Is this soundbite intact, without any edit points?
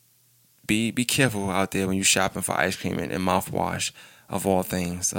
yes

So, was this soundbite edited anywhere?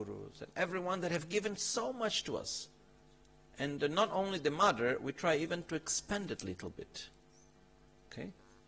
no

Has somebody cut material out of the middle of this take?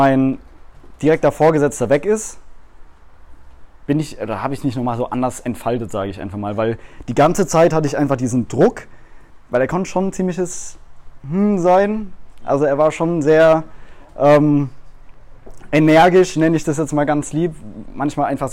no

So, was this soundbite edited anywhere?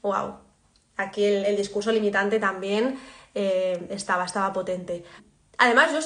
yes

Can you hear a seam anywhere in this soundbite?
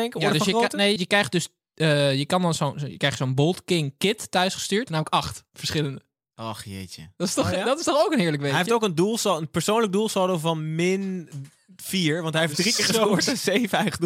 yes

